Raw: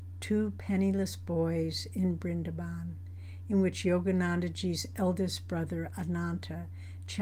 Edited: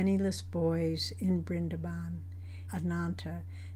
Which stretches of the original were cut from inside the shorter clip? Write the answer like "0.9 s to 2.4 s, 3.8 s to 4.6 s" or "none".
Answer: 3.4 s to 5.9 s